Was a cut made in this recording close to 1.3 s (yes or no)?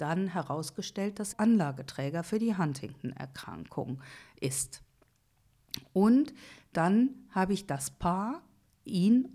yes